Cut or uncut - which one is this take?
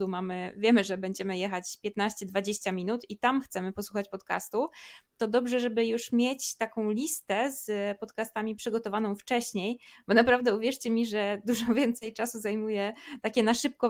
uncut